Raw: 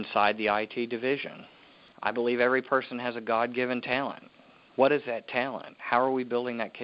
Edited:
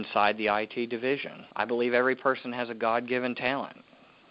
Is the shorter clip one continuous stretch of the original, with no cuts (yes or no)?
no